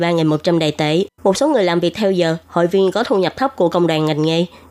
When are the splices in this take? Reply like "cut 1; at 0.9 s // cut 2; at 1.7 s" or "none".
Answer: cut 1; at 1.1 s